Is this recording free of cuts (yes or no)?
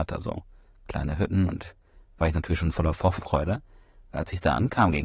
yes